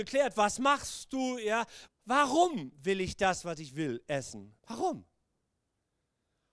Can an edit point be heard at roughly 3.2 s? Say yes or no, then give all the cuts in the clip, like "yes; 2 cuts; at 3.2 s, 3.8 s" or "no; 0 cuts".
no; 2 cuts; at 1.9 s, 4.6 s